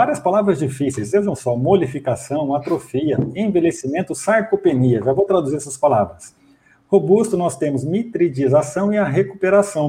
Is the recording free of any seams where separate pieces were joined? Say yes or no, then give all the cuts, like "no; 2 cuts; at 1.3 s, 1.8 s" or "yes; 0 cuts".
yes; 0 cuts